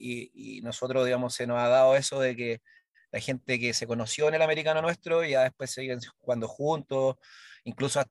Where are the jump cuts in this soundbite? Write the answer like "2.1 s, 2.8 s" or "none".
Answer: none